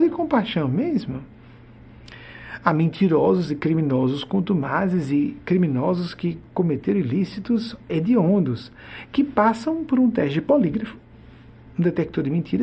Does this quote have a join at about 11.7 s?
no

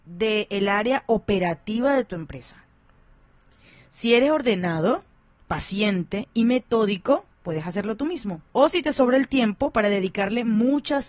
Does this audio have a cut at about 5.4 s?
no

